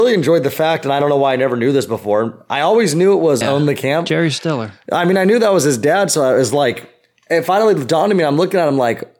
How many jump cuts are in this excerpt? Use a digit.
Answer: 1